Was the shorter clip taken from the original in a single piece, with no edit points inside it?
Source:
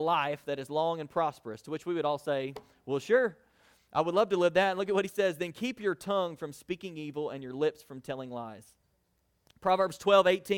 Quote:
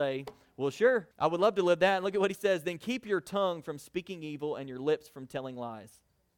no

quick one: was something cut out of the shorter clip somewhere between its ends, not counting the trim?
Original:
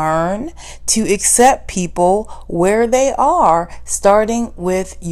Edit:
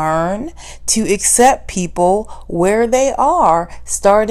no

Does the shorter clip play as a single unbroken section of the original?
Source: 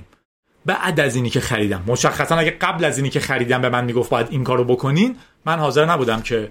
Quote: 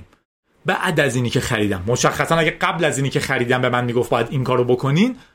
yes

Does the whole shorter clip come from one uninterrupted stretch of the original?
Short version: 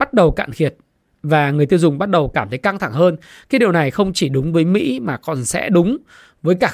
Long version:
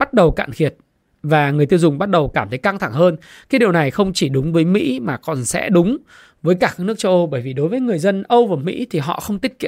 yes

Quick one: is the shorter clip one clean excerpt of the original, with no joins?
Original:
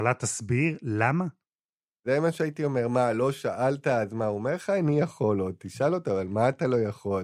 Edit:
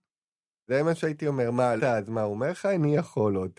no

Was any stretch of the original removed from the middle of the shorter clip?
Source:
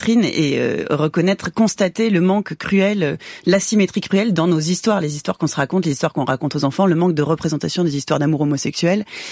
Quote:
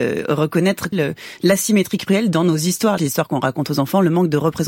yes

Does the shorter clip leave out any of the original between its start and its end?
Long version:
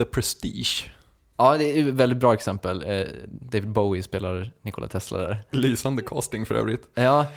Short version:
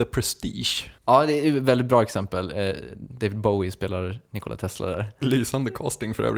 yes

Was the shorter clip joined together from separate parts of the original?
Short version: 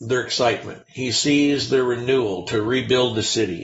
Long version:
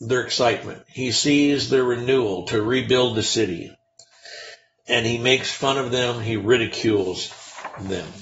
no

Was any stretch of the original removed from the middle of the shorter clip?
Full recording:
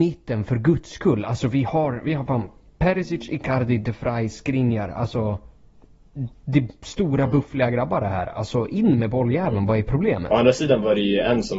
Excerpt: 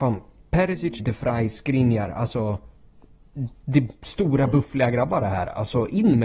yes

